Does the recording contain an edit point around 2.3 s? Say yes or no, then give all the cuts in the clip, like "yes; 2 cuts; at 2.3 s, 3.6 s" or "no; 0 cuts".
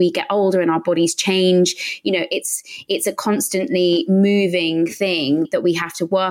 no; 0 cuts